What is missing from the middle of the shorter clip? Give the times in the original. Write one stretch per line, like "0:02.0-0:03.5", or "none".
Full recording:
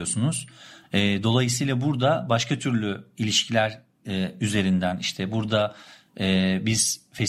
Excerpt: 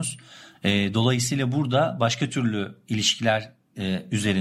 none